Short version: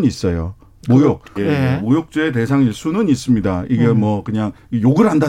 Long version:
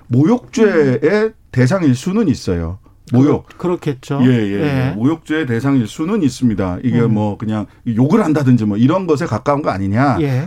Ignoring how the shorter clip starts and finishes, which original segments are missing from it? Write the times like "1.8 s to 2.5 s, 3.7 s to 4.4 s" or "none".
3.6 s to 4.5 s